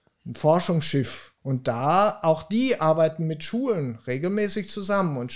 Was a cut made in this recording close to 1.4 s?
yes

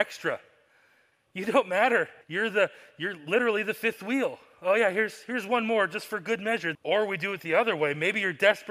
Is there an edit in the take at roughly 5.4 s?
no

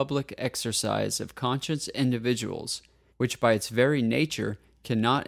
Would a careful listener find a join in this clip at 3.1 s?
yes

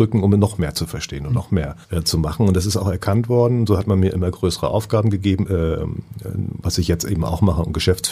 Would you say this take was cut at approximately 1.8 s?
yes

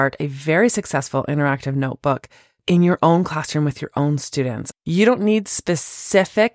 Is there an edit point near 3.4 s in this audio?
no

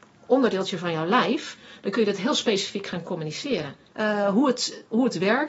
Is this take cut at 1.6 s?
no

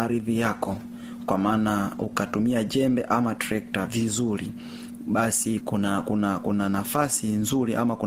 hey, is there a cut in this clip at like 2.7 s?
no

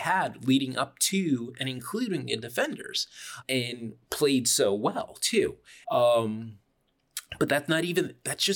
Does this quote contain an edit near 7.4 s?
no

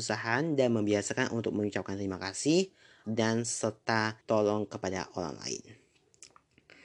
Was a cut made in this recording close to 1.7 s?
no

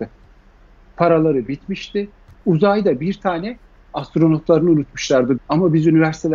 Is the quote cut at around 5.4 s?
yes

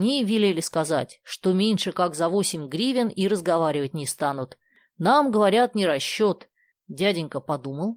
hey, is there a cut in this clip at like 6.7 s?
yes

